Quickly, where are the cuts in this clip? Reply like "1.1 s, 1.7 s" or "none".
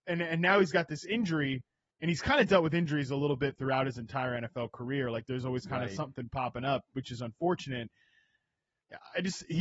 none